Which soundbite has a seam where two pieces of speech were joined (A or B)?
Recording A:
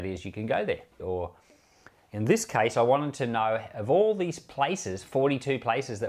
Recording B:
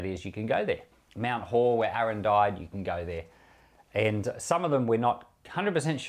A